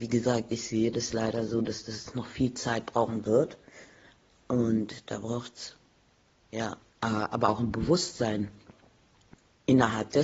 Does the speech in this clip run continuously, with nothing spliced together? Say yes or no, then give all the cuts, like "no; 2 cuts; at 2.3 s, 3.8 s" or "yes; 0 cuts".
no; 1 cut; at 6.8 s